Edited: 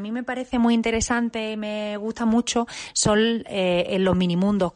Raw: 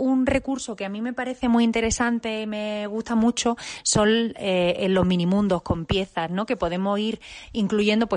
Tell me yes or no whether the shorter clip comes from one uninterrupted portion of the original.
yes